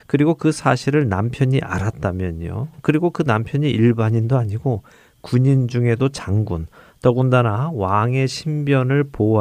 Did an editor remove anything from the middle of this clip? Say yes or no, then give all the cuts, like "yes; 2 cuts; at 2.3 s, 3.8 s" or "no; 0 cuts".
no; 0 cuts